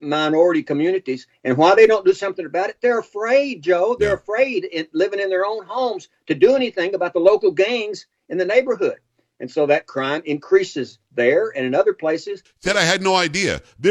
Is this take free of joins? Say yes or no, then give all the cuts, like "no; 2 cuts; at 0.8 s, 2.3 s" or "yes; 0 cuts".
yes; 0 cuts